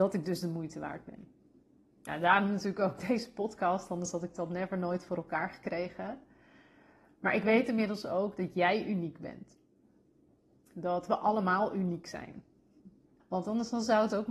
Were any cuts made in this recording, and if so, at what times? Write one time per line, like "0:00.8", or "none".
0:13.2

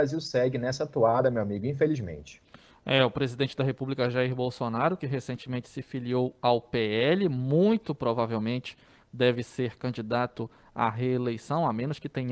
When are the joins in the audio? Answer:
none

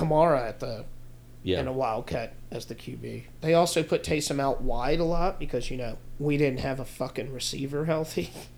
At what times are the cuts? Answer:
none

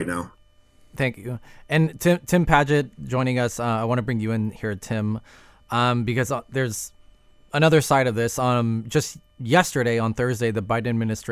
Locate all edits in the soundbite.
none

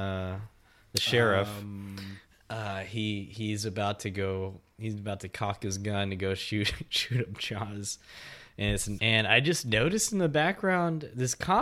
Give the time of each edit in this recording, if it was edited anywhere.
0:09.0

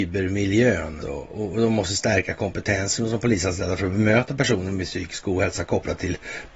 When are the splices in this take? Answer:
0:01.0

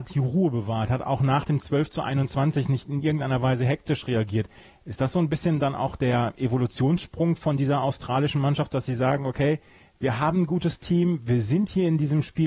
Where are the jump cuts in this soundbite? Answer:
none

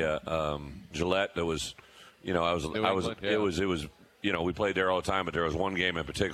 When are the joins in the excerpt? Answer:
0:00.9

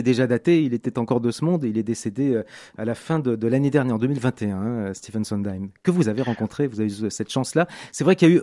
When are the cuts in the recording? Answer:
none

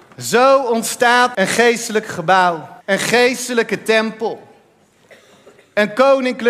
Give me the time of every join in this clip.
0:01.3
0:02.8

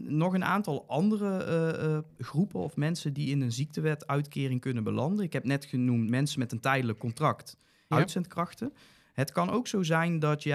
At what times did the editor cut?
0:07.9

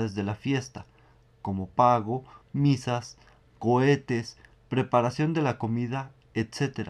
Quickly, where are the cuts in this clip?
0:02.4

